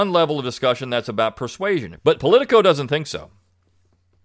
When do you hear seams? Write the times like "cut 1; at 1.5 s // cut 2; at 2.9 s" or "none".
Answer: cut 1; at 2.0 s